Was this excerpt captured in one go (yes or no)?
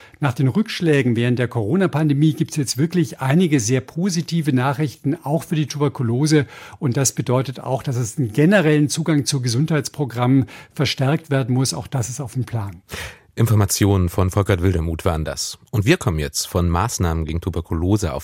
yes